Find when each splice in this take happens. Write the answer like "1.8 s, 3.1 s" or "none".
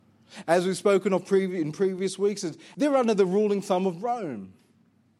2.7 s